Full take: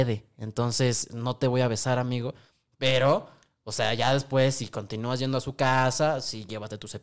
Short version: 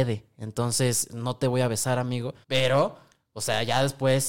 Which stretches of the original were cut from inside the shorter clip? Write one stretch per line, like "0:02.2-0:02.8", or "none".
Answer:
0:02.4-0:02.7